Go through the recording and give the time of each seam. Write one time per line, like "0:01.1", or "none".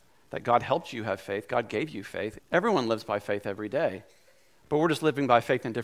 0:02.4